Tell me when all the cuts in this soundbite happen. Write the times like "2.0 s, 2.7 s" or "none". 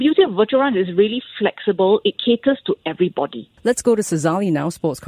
3.6 s